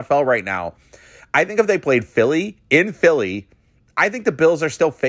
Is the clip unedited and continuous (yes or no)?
yes